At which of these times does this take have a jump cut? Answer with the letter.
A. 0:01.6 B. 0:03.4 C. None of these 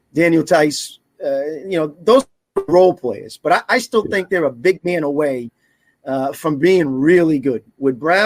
C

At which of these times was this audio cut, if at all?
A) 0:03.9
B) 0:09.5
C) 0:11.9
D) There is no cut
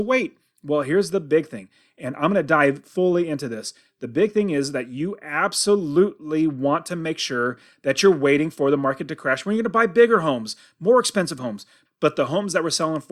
C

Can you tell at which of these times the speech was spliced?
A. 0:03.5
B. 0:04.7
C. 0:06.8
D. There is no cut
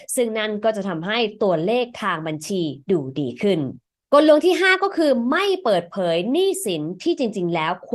D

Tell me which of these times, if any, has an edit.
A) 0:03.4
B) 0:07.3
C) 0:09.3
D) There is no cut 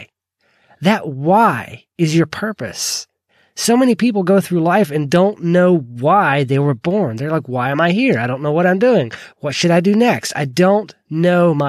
D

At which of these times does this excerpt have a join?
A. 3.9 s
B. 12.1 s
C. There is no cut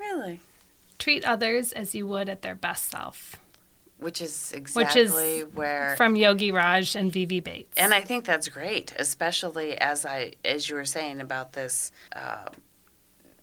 B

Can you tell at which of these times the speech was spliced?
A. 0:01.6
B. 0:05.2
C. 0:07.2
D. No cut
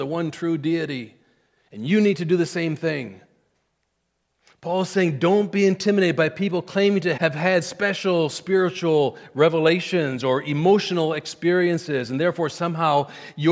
C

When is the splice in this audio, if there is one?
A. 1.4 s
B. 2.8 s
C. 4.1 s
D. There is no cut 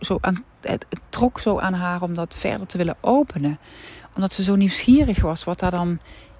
D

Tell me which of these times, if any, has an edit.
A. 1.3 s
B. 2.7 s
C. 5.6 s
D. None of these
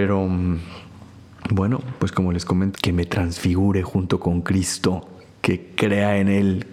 B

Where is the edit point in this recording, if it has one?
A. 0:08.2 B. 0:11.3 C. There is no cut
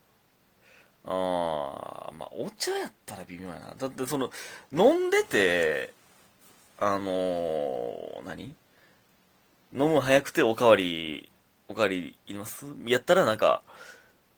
B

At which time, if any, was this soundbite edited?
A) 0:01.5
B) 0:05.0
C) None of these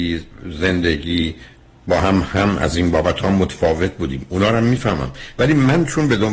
C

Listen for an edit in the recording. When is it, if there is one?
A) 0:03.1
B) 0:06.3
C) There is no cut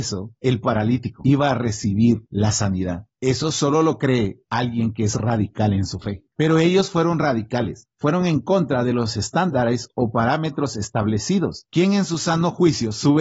B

